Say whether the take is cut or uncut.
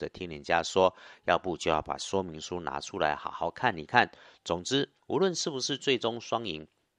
cut